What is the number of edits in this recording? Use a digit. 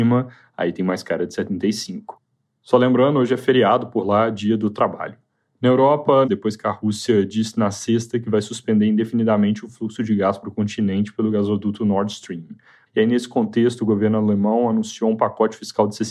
2